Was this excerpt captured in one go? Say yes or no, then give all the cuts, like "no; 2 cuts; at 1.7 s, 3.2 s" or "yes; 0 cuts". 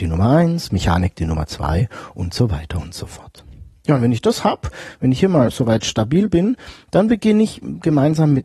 yes; 0 cuts